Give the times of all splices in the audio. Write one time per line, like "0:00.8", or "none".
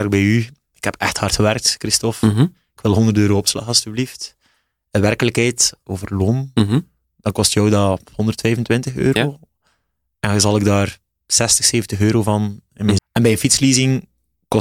0:05.9
0:13.0